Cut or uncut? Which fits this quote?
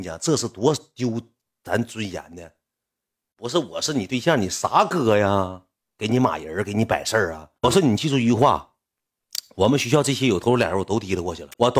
uncut